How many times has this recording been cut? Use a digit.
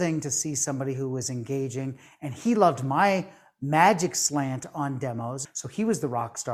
1